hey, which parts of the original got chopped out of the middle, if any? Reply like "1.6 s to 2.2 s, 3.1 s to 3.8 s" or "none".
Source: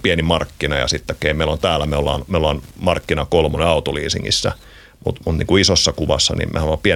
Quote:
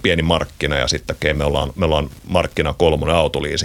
1.3 s to 1.9 s